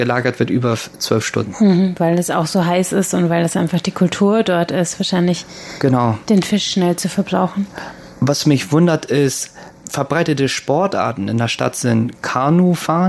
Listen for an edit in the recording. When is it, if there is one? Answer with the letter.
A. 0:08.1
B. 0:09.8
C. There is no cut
B